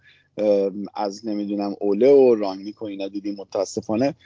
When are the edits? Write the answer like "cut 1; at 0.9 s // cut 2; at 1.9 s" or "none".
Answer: none